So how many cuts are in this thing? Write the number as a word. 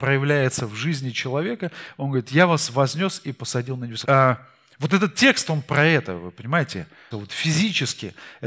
two